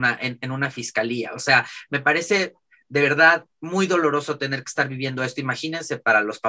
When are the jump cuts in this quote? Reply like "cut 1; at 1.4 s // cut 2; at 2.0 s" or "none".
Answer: none